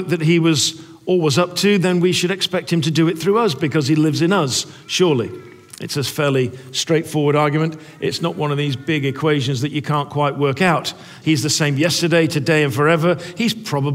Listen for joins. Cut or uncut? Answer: cut